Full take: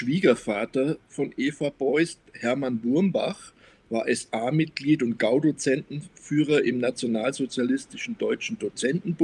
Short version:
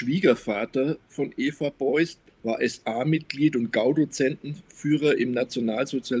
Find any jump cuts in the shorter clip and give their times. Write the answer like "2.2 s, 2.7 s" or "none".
2.3 s